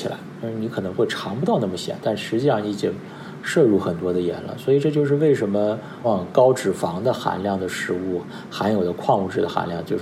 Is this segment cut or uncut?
cut